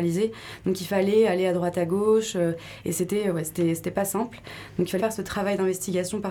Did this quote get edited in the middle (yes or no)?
yes